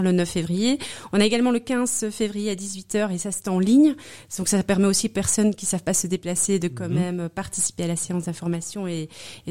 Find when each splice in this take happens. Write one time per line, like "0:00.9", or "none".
none